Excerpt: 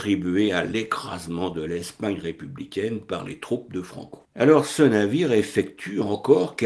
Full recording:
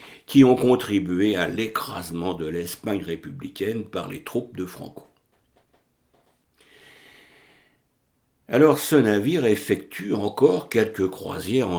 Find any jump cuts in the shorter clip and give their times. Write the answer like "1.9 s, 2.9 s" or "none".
4.2 s